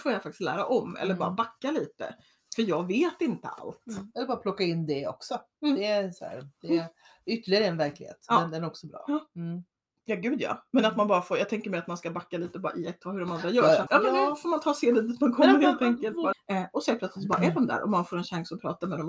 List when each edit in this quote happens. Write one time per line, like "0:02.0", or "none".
0:13.9
0:16.3